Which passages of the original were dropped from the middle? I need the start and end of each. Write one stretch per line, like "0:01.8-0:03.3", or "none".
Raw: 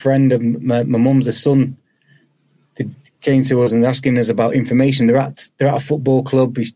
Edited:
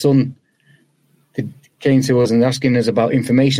none

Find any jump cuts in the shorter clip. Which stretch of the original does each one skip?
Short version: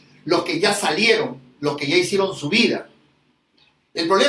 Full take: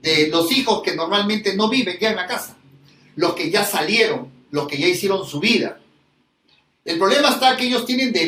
none

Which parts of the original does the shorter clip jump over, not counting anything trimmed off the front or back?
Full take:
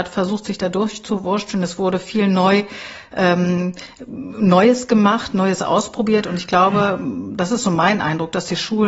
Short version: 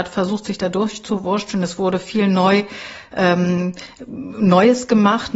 none

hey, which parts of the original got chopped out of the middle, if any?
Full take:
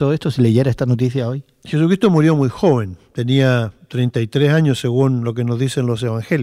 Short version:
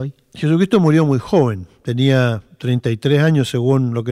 none

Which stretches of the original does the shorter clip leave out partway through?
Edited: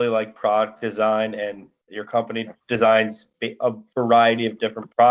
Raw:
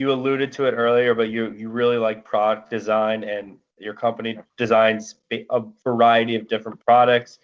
none

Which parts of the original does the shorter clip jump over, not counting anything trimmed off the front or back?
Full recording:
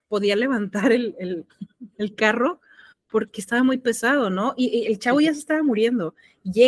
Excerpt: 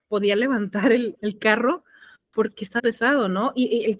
0:01.1-0:01.9
0:03.5-0:03.8

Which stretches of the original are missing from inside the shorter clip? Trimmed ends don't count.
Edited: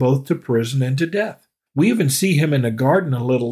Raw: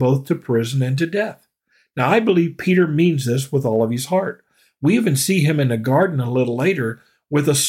0:01.7-0:04.7

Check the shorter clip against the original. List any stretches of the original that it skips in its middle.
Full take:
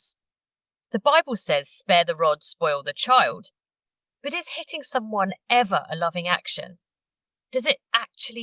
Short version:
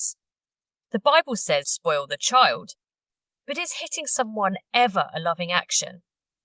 0:01.6-0:02.4

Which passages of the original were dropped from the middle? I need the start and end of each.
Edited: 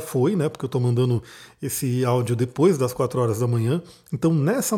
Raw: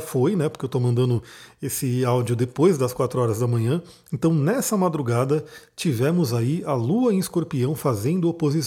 none

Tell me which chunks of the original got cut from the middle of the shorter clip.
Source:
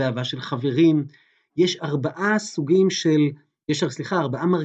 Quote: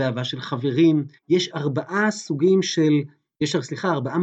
0:01.2-0:01.4

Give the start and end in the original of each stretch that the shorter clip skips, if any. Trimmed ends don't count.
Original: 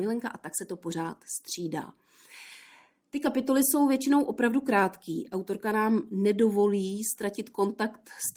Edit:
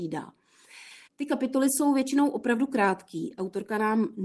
0:02.7-0:03.0

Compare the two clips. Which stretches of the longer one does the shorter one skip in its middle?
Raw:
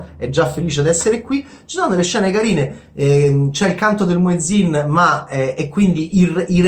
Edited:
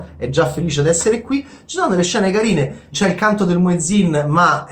0:02.9-0:03.5

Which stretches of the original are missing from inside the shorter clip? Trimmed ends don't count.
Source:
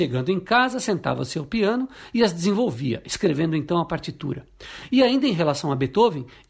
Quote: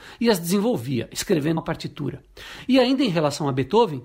0:03.5-0:03.8

